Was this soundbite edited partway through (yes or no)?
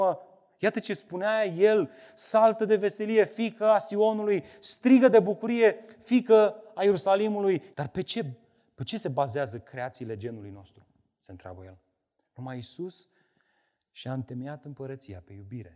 yes